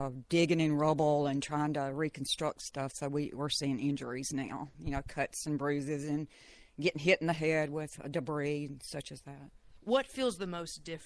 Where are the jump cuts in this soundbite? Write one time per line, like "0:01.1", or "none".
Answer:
none